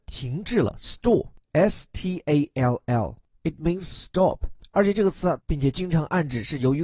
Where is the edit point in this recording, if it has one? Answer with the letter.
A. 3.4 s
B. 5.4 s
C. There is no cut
B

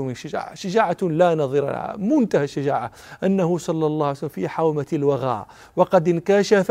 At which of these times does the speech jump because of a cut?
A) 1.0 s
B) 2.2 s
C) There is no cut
C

